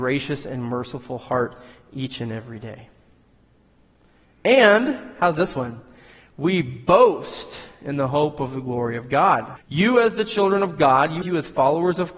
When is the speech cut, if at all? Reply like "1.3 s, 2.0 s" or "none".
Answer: 9.6 s, 11.2 s